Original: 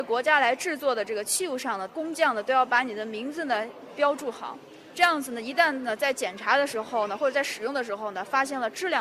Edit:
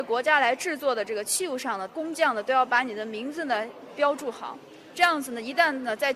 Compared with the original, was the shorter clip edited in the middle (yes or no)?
no